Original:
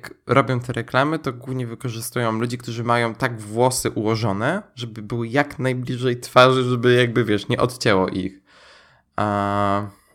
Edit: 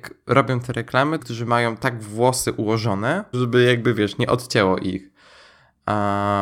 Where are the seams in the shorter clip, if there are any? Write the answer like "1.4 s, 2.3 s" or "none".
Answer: 1.2 s, 3.3 s